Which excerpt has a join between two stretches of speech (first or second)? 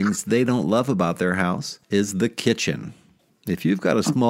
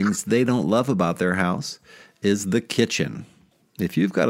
first